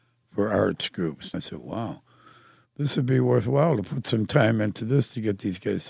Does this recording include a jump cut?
yes; 1 cut; at 1.3 s

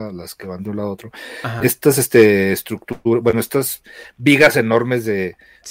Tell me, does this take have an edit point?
no; 0 cuts

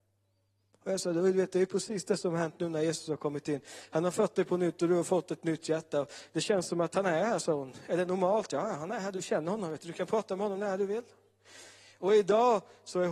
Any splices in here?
no; 0 cuts

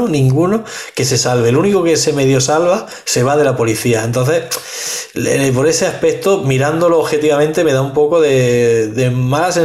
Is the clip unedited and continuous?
yes; 0 cuts

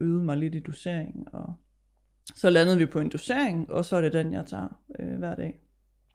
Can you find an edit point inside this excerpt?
no; 0 cuts

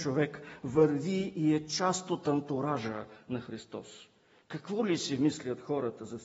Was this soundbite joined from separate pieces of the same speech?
no; 0 cuts

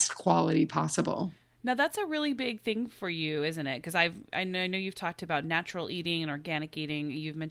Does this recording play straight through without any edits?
yes; 0 cuts

